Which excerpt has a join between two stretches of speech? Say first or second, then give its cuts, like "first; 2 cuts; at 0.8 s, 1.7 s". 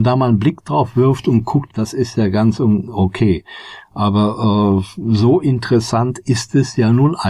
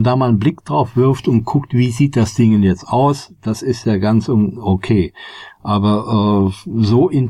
first; 1 cut; at 1.7 s